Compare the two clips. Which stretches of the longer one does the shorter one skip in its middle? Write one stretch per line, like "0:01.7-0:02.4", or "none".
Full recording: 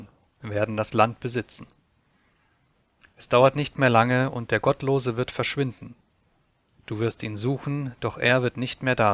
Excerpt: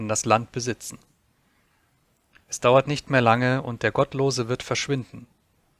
none